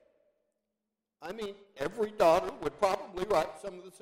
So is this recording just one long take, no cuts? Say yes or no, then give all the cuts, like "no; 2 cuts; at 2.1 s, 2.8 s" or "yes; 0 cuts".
no; 1 cut; at 1.8 s